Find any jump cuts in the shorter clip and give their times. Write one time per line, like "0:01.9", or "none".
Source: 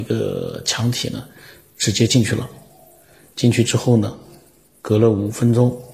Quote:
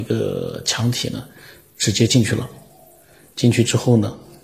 none